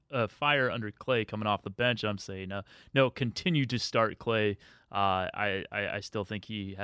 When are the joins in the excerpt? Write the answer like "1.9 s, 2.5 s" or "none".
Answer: none